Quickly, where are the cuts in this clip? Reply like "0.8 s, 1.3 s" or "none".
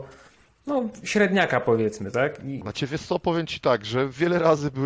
2.6 s